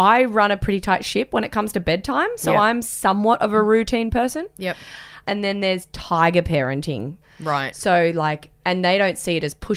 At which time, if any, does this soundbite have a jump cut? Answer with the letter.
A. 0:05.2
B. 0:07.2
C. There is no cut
B